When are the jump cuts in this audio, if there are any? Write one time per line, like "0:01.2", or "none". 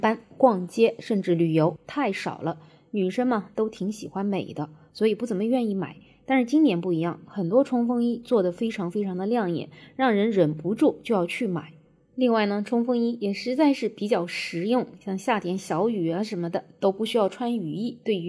0:01.8